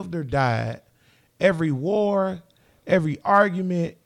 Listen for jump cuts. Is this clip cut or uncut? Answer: uncut